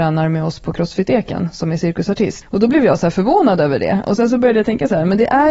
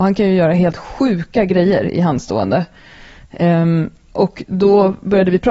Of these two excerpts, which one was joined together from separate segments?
first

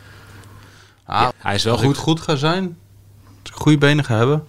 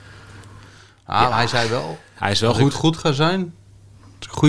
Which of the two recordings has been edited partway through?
first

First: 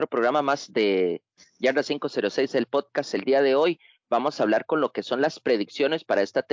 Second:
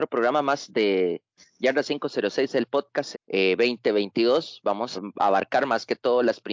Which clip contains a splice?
second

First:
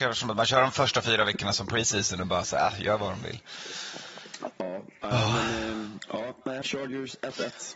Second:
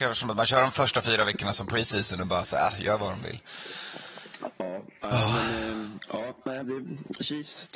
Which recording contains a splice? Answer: first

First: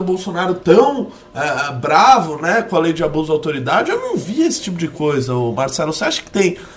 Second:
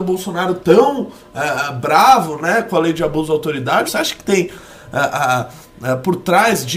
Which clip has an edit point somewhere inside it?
second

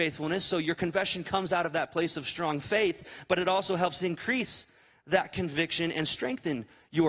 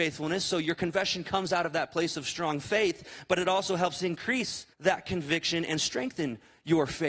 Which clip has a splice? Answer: second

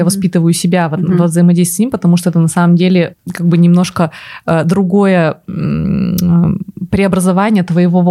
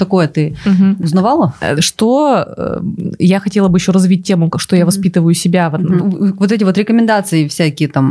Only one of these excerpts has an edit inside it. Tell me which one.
second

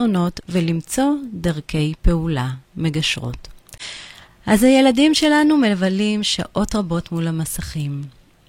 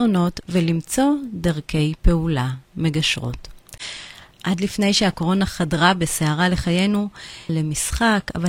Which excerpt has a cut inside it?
second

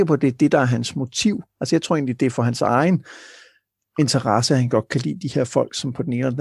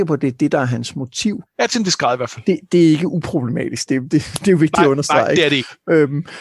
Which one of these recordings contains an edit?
second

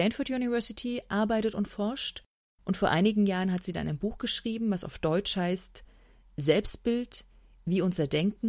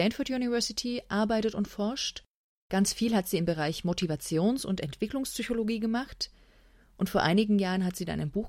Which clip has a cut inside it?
first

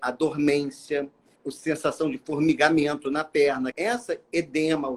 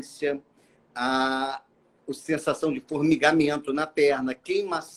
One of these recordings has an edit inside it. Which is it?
first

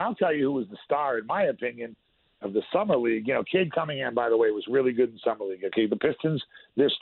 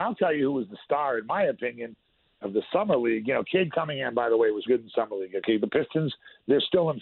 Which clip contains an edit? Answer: second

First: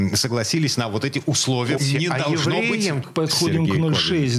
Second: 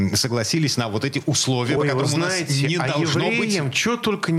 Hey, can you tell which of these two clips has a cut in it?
first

